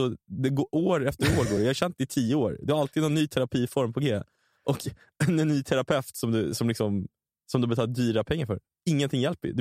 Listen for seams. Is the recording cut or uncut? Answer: uncut